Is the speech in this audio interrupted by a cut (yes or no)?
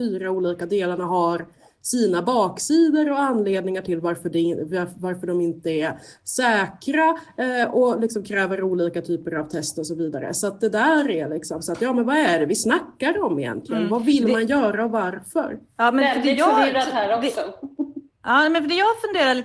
no